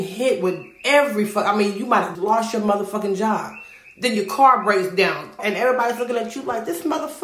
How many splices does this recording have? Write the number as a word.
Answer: two